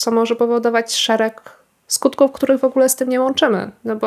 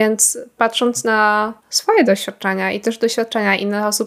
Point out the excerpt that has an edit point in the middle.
second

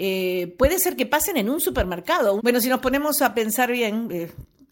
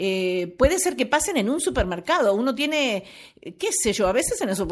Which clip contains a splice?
first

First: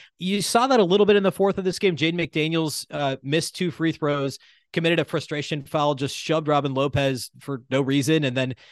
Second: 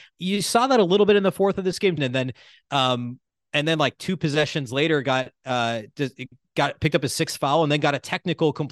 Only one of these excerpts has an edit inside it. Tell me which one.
second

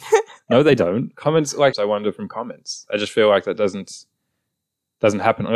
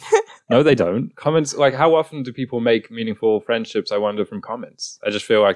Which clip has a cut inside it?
first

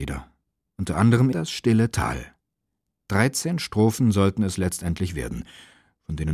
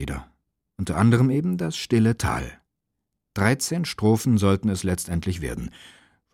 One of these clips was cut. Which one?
first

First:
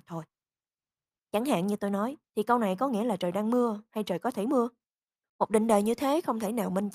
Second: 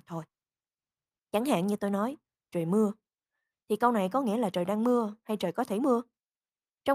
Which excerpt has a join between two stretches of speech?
first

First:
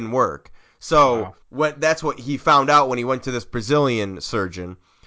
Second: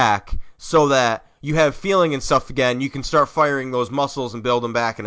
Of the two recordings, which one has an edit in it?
first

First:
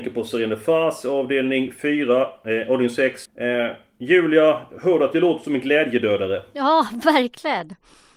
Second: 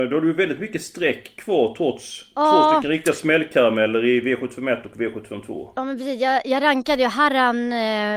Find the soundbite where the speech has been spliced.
first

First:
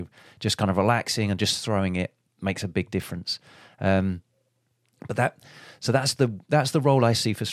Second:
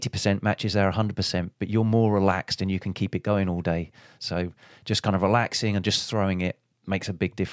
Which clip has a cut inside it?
second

